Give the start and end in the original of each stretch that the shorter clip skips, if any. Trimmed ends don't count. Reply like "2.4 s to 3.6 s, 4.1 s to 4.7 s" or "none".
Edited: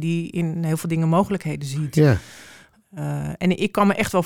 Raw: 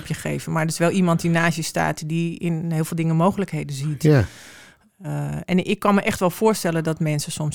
none